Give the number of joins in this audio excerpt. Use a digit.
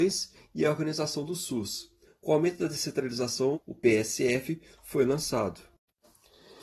2